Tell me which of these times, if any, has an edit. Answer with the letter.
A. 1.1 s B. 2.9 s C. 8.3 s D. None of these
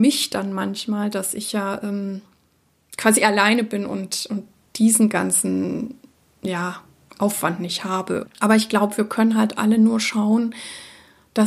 C